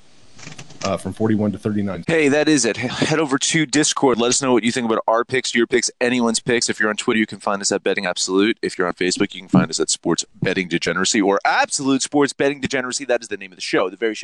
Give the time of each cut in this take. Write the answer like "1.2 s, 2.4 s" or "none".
2.0 s